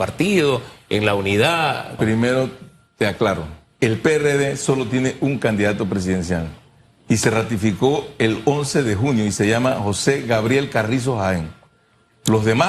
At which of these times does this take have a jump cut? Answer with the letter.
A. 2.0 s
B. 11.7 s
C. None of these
A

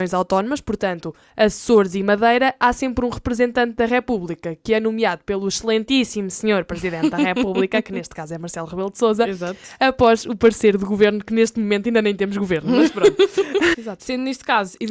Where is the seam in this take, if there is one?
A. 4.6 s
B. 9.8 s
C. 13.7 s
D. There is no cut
C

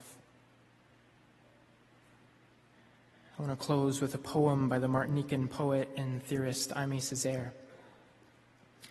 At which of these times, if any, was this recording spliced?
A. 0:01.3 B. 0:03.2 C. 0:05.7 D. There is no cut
D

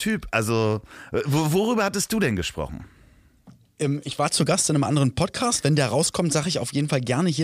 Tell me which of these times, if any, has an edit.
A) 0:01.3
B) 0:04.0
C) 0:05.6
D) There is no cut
D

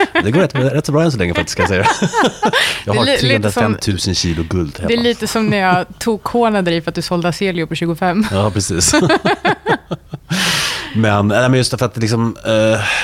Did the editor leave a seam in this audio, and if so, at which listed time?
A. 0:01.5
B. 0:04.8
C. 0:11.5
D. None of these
D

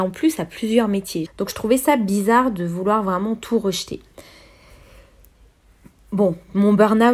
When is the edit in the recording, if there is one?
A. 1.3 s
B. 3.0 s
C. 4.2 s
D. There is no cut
A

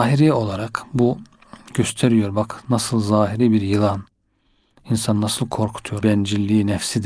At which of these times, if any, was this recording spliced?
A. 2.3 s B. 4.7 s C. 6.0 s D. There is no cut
C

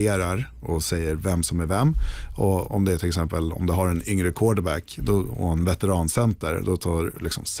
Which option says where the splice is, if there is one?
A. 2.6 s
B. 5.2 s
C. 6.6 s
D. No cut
A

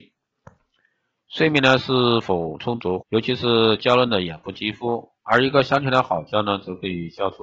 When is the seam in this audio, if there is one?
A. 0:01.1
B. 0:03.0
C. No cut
B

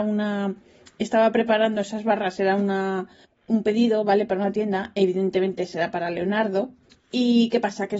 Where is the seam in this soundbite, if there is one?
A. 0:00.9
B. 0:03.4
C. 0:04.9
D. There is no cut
D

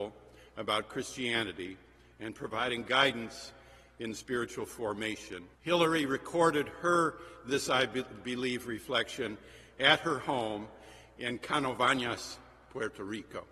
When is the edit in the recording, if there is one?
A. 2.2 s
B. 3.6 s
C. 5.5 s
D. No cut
C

